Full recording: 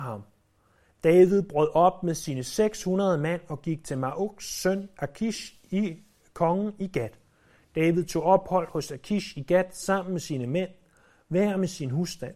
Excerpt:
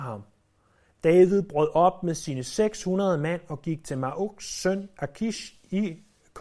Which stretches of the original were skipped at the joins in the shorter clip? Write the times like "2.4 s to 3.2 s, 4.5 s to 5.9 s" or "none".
none